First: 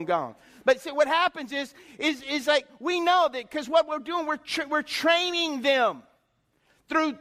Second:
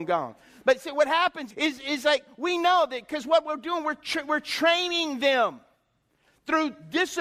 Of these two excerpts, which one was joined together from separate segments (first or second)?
second